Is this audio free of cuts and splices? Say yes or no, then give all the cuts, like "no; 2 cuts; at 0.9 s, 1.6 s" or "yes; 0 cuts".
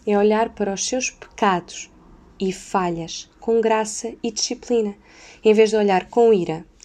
yes; 0 cuts